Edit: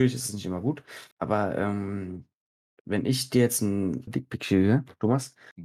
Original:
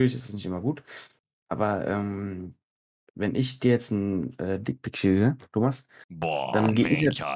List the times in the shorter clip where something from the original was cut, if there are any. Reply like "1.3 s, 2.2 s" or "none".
1.1 s, 4.1 s